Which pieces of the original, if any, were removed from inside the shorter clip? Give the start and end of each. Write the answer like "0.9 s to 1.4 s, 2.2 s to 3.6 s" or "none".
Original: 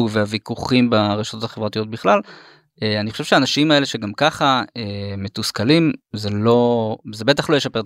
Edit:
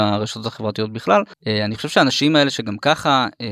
2.3 s to 2.7 s